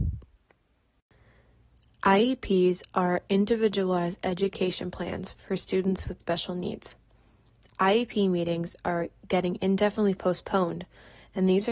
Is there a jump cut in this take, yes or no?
no